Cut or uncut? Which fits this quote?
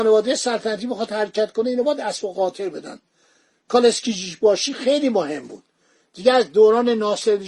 uncut